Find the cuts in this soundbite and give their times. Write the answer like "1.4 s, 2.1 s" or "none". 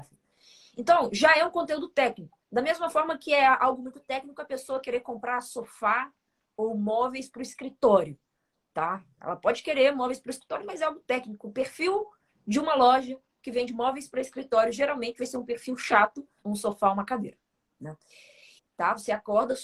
16.4 s, 18.6 s